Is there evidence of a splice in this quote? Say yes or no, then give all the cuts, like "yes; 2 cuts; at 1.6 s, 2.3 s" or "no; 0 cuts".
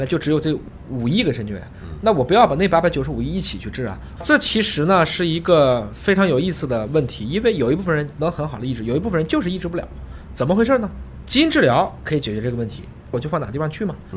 yes; 3 cuts; at 4.2 s, 11.2 s, 13.1 s